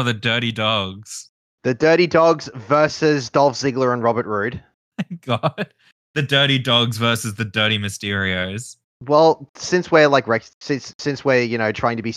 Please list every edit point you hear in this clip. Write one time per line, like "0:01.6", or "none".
none